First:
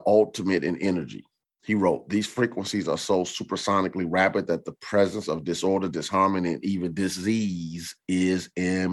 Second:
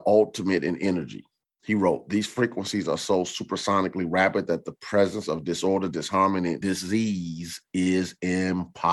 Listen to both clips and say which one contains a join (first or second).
second